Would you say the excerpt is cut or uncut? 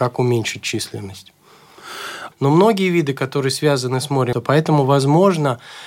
cut